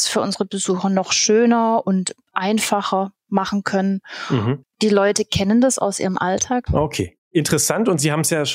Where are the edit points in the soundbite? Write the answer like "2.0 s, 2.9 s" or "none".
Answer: 4.6 s, 6.7 s